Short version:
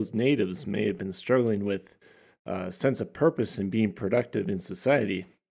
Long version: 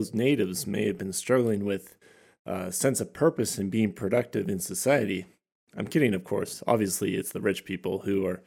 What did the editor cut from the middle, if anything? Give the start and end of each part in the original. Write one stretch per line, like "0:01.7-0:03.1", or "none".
none